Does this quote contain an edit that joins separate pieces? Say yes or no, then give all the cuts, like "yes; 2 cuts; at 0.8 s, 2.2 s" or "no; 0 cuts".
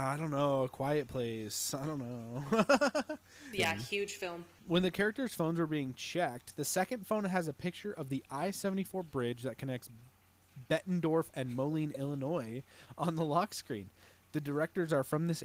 yes; 2 cuts; at 3.5 s, 11.3 s